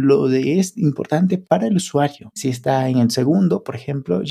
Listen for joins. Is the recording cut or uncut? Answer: cut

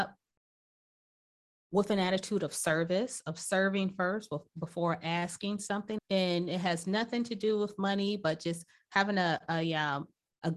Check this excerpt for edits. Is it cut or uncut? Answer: cut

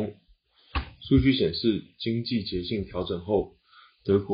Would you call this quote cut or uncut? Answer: uncut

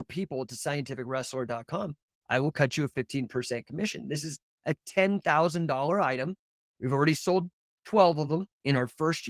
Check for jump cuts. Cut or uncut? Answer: uncut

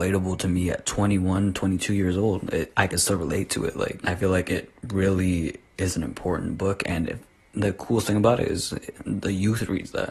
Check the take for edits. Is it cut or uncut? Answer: uncut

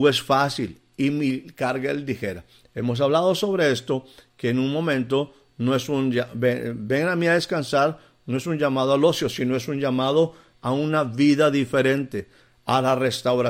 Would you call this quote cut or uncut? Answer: uncut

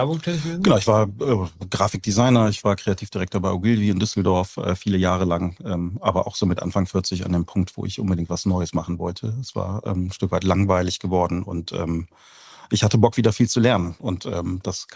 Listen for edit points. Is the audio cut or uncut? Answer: uncut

